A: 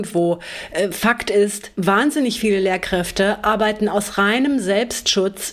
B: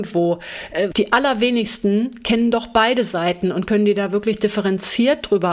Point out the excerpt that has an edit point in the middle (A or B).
B